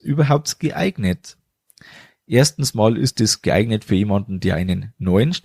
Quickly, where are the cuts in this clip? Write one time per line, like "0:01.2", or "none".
none

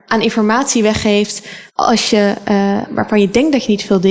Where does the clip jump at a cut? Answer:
0:01.7
0:02.9

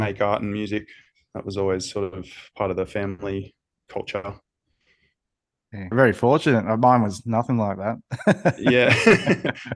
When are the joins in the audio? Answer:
0:05.9

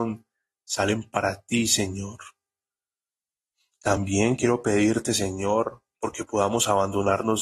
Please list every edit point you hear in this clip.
none

